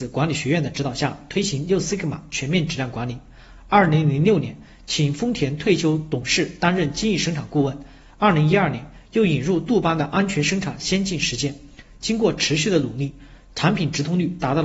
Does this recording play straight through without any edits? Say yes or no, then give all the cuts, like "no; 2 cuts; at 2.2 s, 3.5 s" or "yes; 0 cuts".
yes; 0 cuts